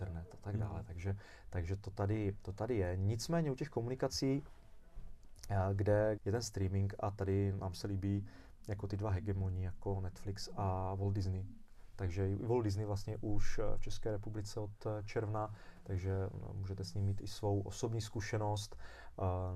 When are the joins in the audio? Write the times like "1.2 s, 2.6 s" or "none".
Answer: 6.2 s